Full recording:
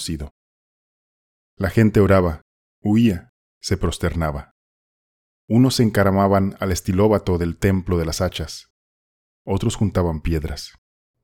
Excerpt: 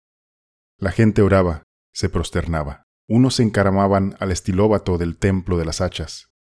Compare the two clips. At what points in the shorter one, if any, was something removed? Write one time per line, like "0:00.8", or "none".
0:01.8
0:02.9